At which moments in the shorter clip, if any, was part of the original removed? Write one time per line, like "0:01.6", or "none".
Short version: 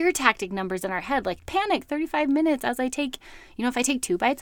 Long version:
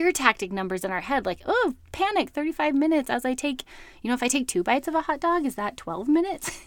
0:01.4